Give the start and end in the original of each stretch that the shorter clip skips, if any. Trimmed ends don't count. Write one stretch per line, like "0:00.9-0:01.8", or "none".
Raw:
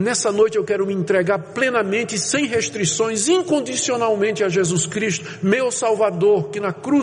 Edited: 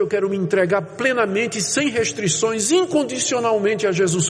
none